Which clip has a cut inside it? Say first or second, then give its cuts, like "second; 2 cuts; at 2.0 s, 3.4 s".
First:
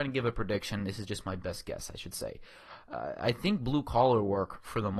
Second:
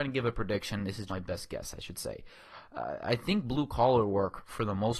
second; 1 cut; at 1.1 s